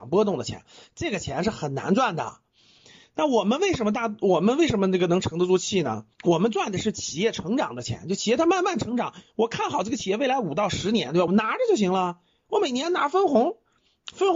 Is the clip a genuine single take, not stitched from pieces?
no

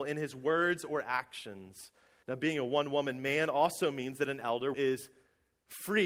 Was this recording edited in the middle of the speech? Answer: yes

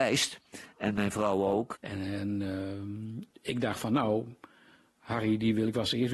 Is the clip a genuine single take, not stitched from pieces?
no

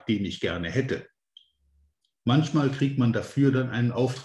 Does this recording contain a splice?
no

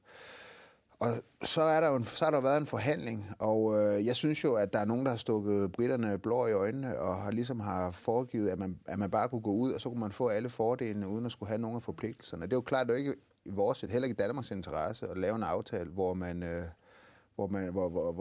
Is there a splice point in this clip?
no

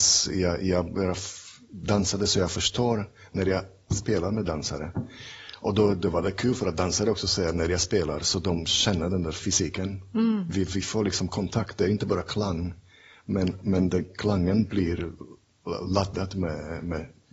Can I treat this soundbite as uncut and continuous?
yes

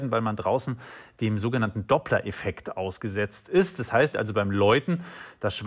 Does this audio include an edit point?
yes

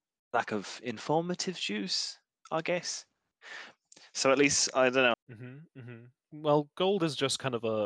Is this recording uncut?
no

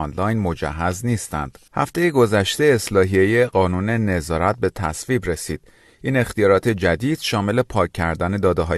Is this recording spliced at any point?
yes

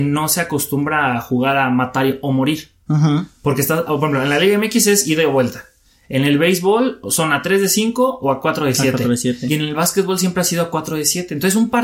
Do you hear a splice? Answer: no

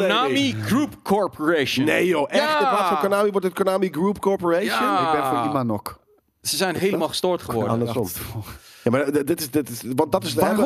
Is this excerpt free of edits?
yes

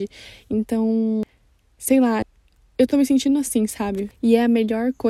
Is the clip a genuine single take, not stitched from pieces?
yes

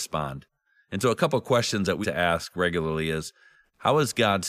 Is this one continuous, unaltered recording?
no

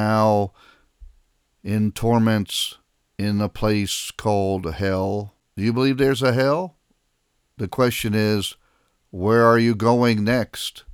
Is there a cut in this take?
yes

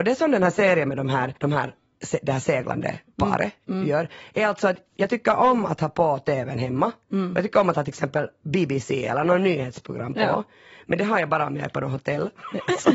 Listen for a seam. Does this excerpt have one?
yes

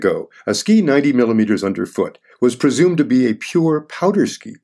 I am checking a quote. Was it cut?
yes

